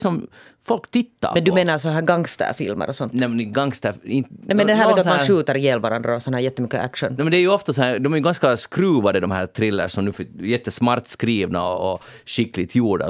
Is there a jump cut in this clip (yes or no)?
no